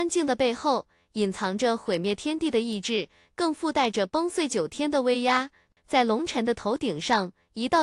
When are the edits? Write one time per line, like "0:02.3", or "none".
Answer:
0:05.8